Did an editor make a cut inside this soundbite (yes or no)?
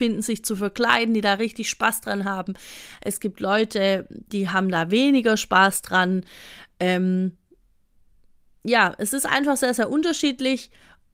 no